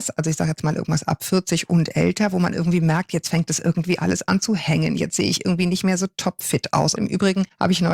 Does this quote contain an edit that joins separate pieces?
yes; 1 cut; at 6.9 s

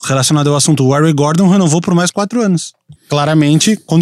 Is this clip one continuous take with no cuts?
no; 1 cut; at 3.0 s

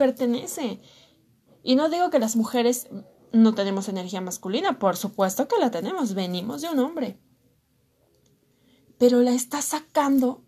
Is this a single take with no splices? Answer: yes; 0 cuts

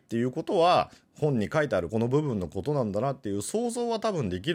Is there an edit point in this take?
yes; 1 cut; at 1.9 s

